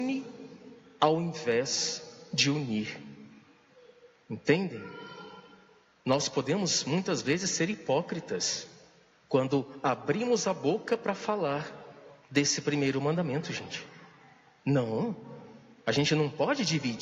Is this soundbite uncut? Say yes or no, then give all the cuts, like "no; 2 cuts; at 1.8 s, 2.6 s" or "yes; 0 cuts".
yes; 0 cuts